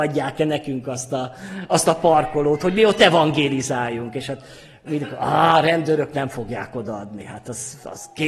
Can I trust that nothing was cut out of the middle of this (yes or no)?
yes